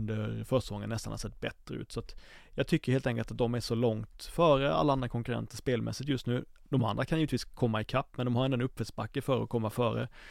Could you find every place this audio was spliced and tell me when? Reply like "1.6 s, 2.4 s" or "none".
none